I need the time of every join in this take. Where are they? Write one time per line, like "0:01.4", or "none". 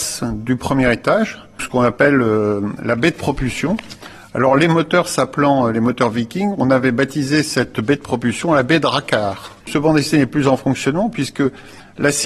0:01.6
0:09.6